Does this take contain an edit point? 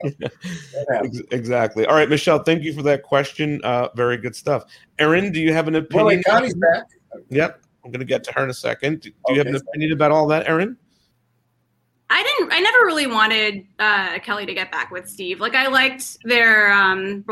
no; 0 cuts

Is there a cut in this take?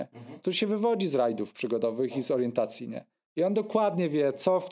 no; 0 cuts

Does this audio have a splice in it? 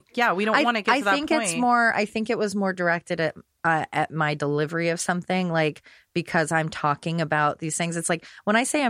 no; 0 cuts

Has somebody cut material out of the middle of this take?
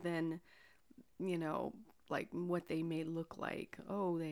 no; 0 cuts

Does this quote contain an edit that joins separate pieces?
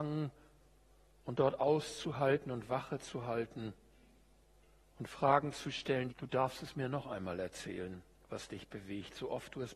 yes; 1 cut; at 6.1 s

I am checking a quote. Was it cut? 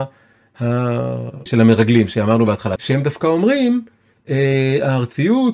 yes; 2 cuts; at 1.5 s, 2.8 s

